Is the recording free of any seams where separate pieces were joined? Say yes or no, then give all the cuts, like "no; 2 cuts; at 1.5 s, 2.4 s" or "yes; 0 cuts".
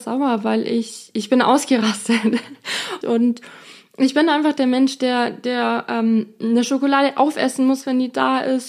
no; 1 cut; at 3.0 s